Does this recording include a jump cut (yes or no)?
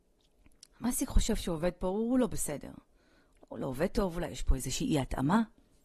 no